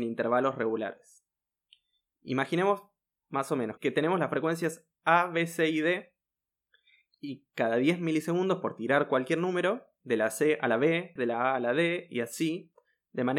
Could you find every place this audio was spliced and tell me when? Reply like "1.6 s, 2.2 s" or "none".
3.8 s, 10.0 s, 11.2 s